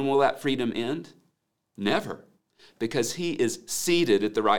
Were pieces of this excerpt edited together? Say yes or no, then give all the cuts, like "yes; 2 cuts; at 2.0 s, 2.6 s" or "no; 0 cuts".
no; 0 cuts